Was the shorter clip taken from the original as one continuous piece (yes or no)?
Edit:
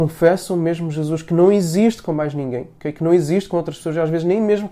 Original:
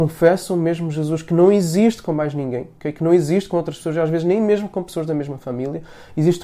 yes